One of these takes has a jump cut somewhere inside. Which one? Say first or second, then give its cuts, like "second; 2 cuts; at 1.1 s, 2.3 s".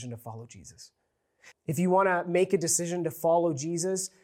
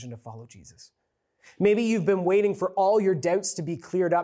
first; 1 cut; at 1.5 s